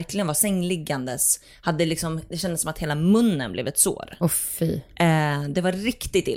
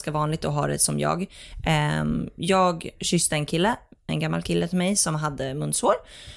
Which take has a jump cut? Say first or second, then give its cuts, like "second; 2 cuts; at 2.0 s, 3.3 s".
second; 1 cut; at 4.1 s